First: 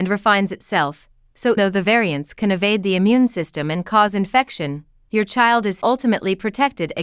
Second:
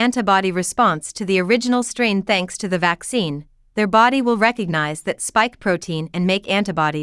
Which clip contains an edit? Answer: first; 2 cuts; at 1.6 s, 5.8 s

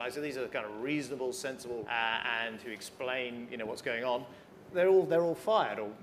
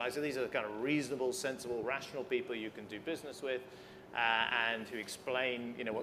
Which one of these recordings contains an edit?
first; 1 cut; at 1.8 s

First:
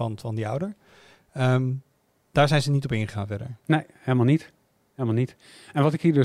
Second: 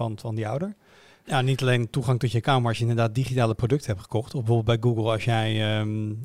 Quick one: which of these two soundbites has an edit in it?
second; 1 cut; at 1.2 s

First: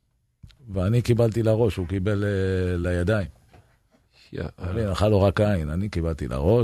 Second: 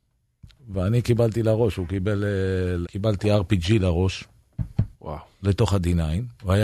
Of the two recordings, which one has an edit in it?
second; 2 cuts; at 2.8 s, 4.9 s

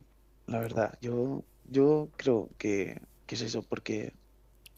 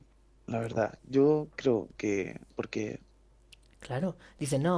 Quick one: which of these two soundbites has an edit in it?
second; 2 cuts; at 1.0 s, 2.5 s

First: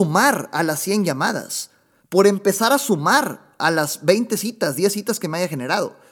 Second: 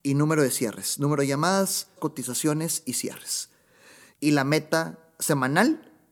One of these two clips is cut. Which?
second; 2 cuts; at 2.0 s, 4.1 s

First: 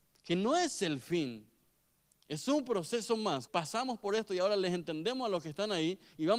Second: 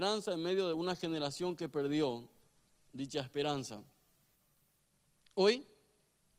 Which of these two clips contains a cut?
first; 1 cut; at 3.5 s

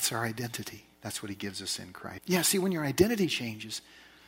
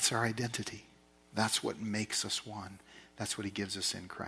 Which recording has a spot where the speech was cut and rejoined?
first; 2 cuts; at 0.9 s, 2.2 s

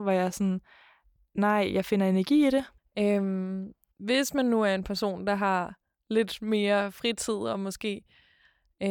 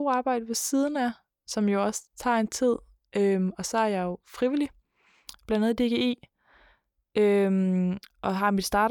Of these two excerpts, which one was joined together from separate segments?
first; 1 cut; at 2.8 s

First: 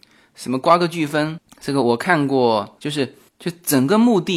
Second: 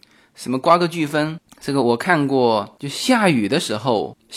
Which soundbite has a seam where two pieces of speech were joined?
first; 1 cut; at 2.8 s

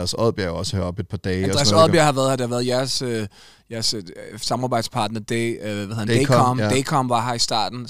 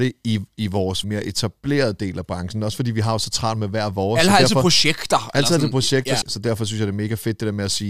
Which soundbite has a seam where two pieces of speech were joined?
second; 2 cuts; at 1.0 s, 6.2 s

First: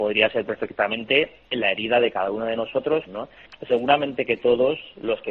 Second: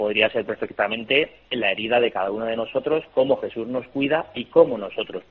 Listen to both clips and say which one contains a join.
first; 1 cut; at 3.1 s

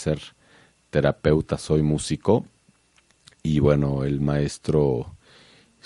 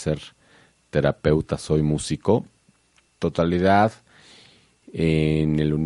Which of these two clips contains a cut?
second; 1 cut; at 3.0 s

